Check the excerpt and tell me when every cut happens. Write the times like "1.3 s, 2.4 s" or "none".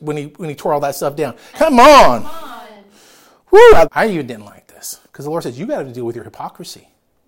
1.5 s, 3.8 s

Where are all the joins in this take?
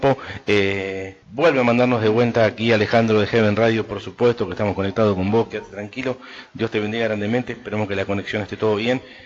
1.2 s

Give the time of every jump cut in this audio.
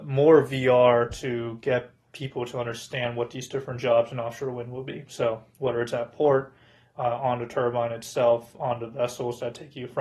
none

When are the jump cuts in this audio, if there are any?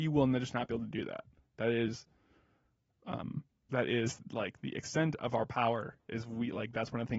1.4 s

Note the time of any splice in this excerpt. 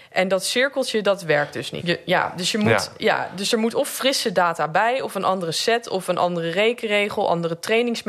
1.8 s

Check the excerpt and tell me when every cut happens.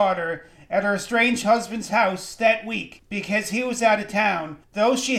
none

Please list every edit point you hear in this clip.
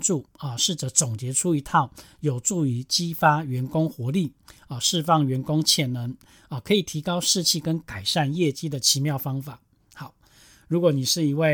none

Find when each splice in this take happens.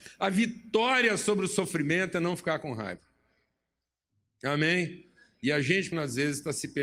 5.9 s

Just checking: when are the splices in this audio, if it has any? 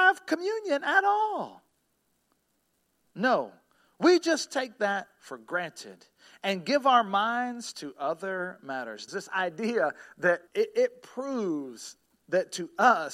9.1 s, 10.5 s

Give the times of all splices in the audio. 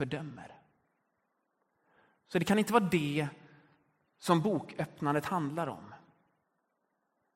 none

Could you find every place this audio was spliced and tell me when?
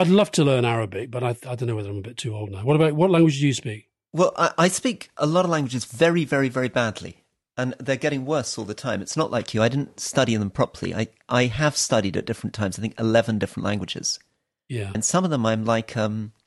14.9 s

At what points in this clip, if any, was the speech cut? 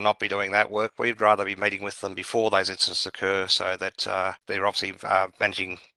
none

